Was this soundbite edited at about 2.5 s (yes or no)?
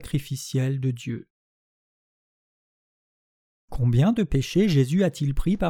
no